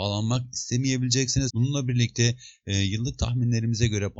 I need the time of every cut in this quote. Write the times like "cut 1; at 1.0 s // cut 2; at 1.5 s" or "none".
cut 1; at 1.5 s

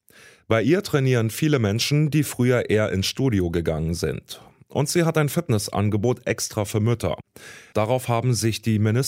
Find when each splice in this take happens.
cut 1; at 7.7 s

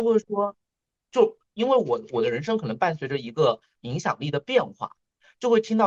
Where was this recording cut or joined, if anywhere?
none

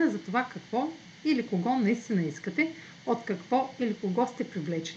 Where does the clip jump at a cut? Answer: none

